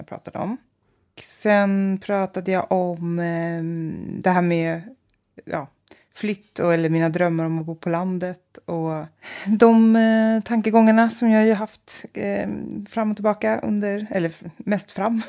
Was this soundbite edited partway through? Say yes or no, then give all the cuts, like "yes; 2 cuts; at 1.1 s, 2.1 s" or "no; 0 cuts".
no; 0 cuts